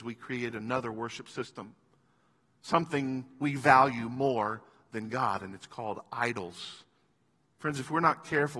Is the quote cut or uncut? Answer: cut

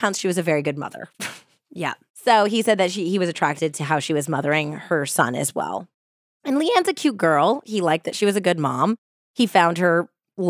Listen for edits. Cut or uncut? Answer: uncut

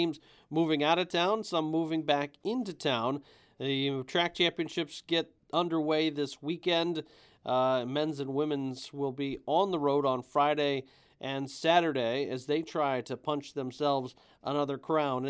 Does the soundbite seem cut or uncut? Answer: uncut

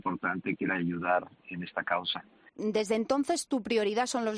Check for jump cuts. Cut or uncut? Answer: cut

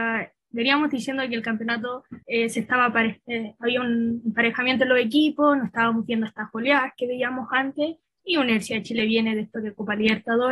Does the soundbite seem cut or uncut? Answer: cut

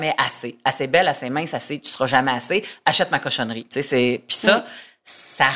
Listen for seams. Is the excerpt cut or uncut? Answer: uncut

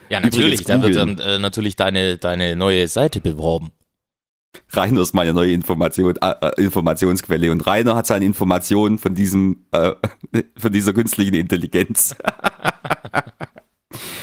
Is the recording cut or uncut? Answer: uncut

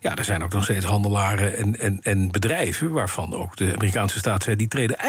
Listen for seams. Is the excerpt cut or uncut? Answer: cut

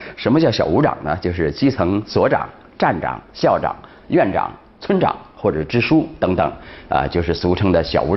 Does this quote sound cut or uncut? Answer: uncut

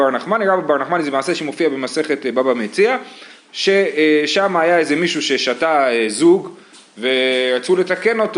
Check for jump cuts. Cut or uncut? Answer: uncut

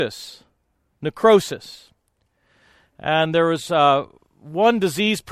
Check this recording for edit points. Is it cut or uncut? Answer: uncut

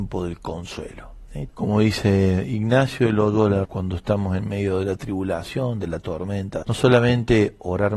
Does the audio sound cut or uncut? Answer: cut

